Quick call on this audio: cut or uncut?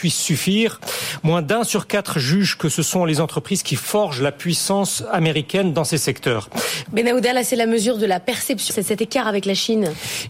cut